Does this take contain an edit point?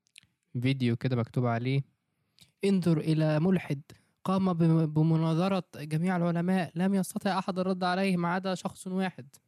no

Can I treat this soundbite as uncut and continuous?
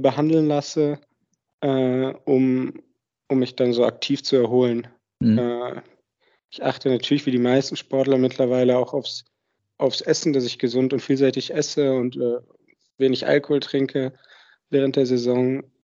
yes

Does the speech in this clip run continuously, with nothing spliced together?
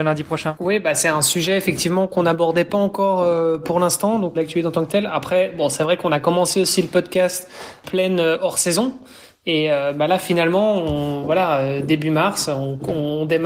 no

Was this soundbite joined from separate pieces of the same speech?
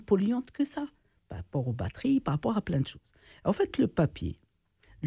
no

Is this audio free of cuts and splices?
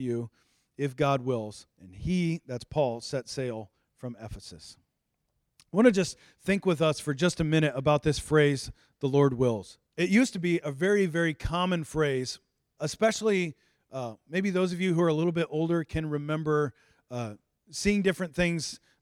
no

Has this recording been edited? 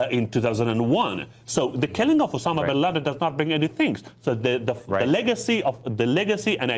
no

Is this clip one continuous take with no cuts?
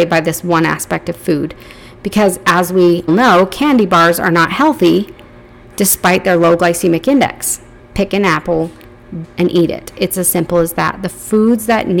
no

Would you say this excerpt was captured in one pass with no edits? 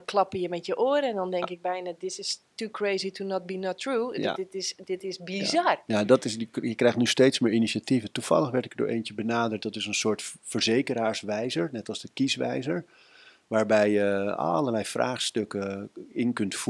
yes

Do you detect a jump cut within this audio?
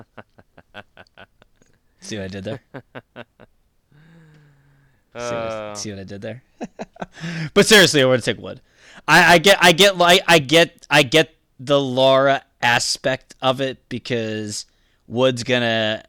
no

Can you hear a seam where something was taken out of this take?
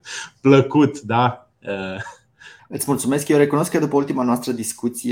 yes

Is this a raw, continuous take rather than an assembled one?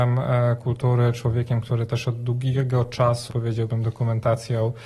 no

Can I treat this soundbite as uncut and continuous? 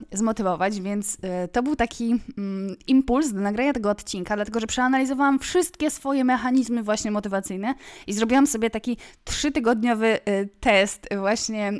yes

